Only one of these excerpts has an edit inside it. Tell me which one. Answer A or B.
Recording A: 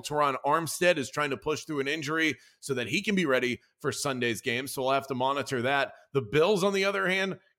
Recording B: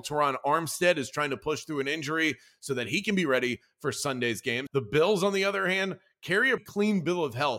B